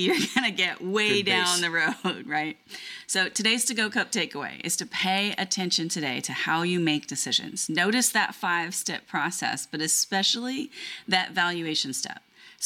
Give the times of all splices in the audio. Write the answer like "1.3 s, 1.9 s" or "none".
none